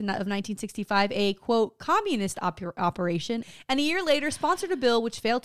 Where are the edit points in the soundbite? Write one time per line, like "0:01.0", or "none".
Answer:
0:03.4